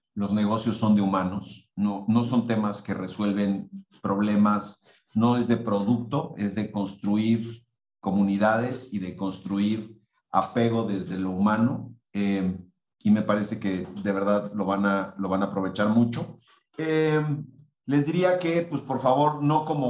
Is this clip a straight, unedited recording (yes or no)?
yes